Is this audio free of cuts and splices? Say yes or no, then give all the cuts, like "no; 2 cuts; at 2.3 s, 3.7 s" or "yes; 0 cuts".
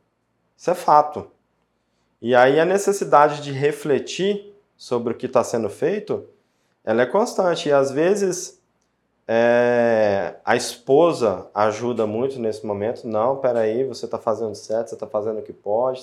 yes; 0 cuts